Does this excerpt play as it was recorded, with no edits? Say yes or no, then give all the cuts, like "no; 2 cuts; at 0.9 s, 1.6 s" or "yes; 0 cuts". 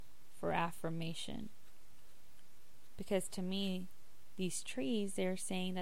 yes; 0 cuts